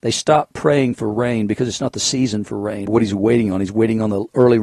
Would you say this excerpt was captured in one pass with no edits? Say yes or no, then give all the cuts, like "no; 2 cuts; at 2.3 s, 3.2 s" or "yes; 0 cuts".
no; 1 cut; at 2.9 s